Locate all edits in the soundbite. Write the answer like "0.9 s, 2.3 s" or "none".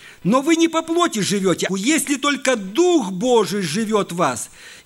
1.7 s